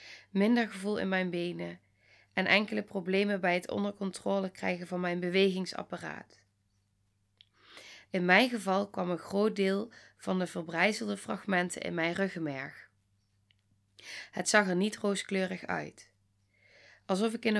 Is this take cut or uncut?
cut